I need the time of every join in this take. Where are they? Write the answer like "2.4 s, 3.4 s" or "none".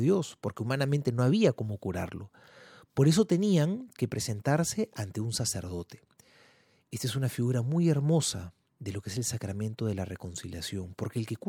none